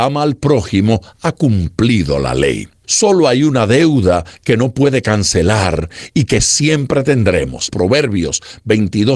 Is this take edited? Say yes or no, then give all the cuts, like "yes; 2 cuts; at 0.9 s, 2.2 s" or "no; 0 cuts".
yes; 2 cuts; at 2.8 s, 7.7 s